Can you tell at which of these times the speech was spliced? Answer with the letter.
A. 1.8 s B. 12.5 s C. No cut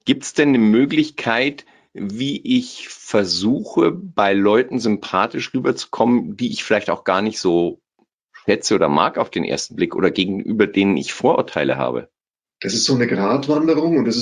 B